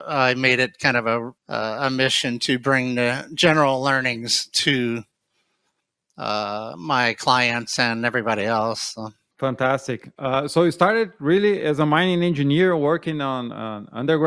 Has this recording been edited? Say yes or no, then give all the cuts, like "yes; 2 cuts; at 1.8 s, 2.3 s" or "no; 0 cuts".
yes; 1 cut; at 1.4 s